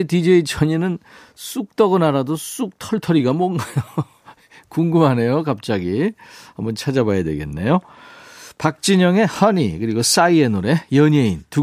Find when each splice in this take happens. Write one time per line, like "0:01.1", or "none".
none